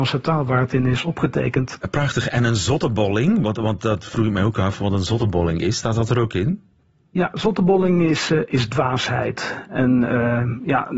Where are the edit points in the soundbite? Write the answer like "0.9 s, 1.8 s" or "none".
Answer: none